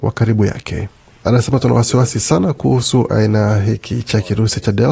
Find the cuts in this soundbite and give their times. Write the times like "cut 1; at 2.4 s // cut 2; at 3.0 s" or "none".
cut 1; at 1.2 s